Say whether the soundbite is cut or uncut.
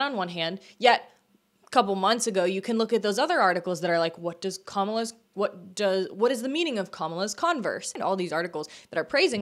uncut